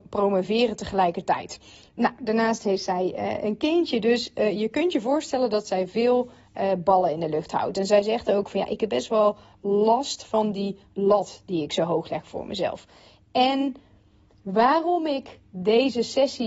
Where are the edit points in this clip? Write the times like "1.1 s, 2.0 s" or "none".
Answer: none